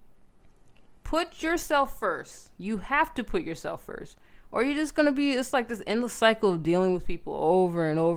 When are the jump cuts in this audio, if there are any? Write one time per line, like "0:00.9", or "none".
0:01.0